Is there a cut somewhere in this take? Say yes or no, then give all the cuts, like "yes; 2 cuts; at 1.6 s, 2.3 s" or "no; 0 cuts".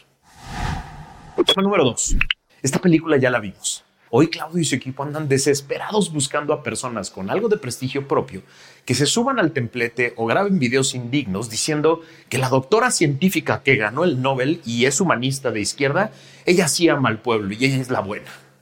yes; 2 cuts; at 2.5 s, 4.1 s